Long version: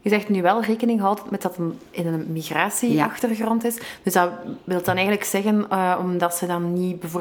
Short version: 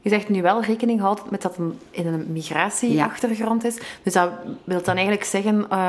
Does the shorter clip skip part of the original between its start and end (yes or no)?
no